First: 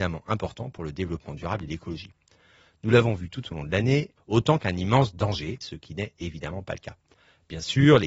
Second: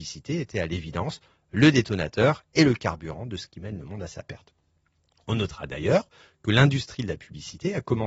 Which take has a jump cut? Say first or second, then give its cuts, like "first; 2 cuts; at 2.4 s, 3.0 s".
first; 2 cuts; at 4.2 s, 5.6 s